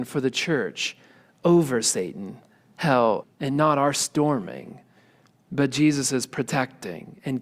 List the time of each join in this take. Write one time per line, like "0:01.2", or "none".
0:03.2